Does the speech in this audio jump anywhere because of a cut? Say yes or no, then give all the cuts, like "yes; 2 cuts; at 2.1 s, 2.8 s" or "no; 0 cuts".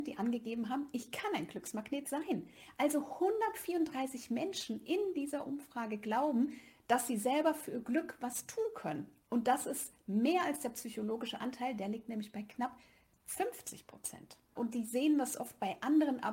yes; 1 cut; at 14.6 s